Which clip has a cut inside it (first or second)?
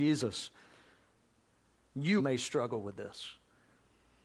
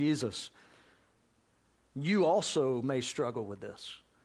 first